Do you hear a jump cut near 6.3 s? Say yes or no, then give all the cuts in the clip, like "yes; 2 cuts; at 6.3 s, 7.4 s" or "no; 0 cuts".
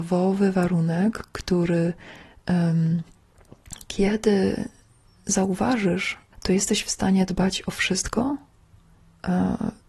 yes; 1 cut; at 6.3 s